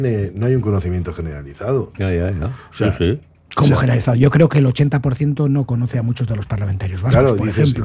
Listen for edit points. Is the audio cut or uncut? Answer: uncut